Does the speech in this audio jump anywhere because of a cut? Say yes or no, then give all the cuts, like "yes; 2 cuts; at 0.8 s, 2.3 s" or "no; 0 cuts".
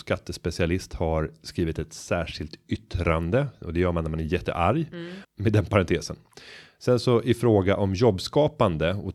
yes; 1 cut; at 5.2 s